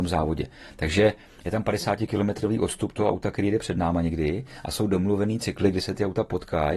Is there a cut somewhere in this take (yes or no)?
no